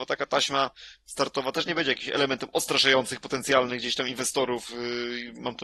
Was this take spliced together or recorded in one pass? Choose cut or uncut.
uncut